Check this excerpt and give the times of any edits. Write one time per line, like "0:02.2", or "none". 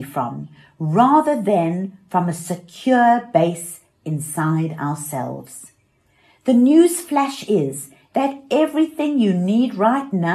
none